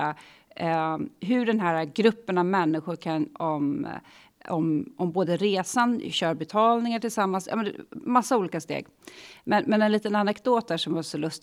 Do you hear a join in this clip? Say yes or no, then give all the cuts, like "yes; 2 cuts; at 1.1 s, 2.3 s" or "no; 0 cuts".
yes; 1 cut; at 3.3 s